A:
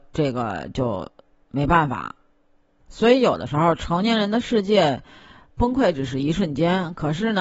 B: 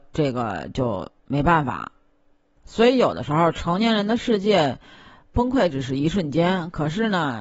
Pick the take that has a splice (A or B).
B